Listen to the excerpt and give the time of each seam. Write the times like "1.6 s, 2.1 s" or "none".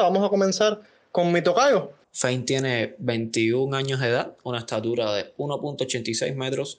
2.0 s